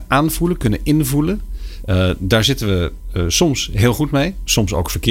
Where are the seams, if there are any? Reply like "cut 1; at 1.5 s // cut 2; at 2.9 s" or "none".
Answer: cut 1; at 1.8 s